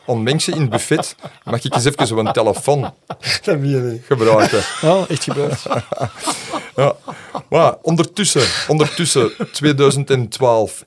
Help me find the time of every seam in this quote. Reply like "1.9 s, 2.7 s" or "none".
none